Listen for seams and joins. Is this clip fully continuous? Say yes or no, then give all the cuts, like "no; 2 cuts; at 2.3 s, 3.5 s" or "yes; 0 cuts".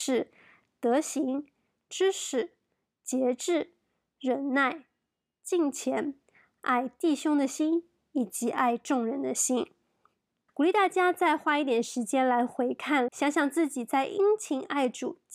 no; 2 cuts; at 10.5 s, 13.1 s